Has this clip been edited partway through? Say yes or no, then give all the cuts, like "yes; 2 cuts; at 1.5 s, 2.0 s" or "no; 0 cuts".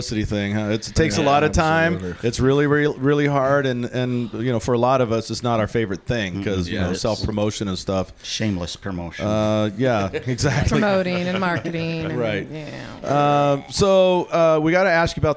no; 0 cuts